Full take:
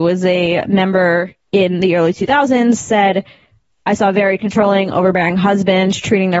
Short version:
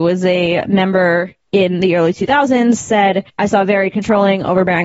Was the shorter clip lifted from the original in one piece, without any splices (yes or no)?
no